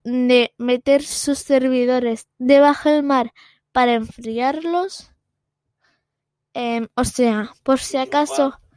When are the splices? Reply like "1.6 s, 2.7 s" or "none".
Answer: none